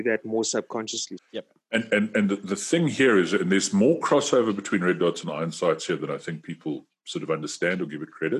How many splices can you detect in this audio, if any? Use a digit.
1